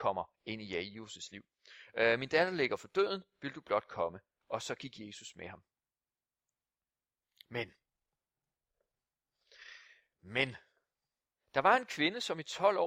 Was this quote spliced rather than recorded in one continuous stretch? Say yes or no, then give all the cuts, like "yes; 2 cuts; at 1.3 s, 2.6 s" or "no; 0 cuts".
no; 0 cuts